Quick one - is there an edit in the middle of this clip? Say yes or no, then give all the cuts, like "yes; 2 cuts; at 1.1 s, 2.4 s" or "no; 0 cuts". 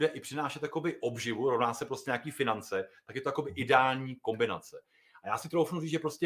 no; 0 cuts